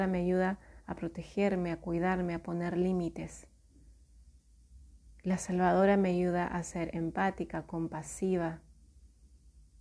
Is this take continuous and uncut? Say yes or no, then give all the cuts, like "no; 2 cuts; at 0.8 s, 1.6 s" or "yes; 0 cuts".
yes; 0 cuts